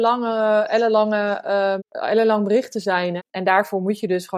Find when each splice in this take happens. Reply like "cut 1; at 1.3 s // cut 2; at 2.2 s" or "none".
cut 1; at 1.8 s // cut 2; at 3.2 s